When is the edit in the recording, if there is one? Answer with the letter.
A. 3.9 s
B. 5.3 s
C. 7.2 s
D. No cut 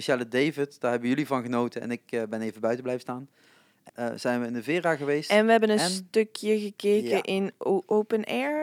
A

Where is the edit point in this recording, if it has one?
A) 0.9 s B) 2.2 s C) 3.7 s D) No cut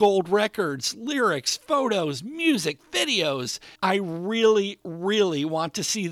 C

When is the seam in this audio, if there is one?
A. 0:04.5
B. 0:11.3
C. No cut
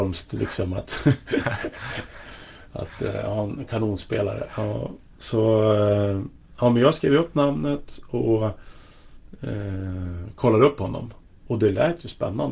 B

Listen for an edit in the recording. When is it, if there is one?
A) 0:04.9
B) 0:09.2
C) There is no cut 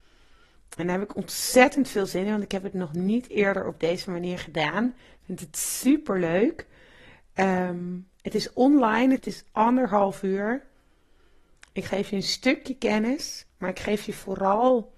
B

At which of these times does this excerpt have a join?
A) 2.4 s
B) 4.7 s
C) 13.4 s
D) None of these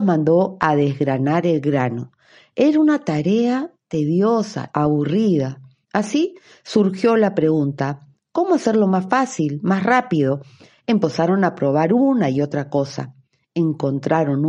B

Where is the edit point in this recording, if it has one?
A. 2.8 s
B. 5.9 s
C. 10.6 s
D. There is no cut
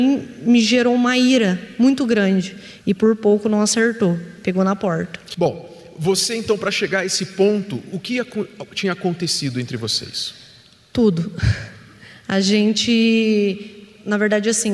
A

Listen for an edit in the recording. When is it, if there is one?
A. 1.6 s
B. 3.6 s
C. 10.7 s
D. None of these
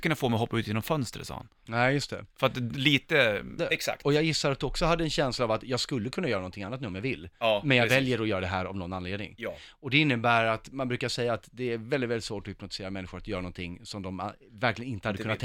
B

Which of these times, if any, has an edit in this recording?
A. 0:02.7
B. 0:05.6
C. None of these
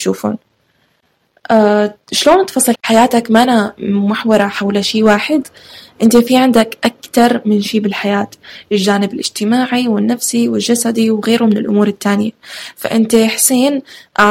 A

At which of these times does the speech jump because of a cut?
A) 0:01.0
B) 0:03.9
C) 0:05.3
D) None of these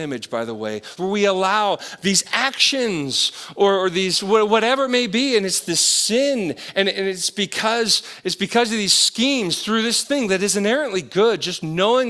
A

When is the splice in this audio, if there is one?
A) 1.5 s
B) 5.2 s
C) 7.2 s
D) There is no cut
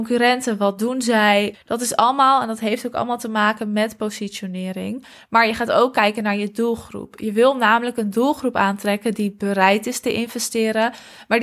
A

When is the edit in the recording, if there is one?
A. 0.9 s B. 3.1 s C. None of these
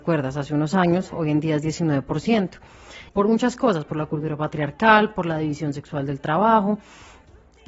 B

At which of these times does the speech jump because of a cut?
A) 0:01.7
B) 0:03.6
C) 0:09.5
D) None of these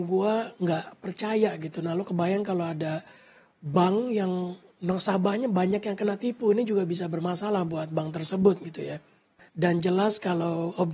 C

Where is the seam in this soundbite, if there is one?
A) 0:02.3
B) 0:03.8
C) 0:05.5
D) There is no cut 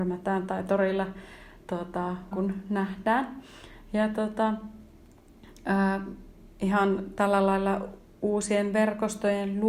A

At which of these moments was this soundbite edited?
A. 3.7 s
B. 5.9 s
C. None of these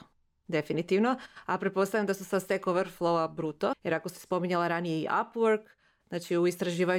A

